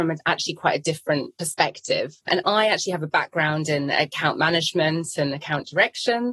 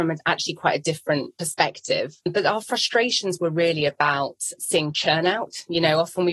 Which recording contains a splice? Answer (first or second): first